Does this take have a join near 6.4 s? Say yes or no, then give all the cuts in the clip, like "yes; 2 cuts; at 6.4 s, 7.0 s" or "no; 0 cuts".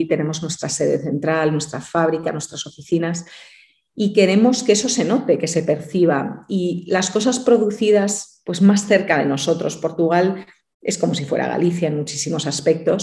no; 0 cuts